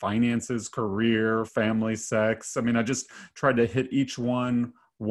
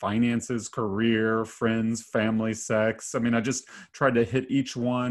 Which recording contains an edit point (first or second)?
first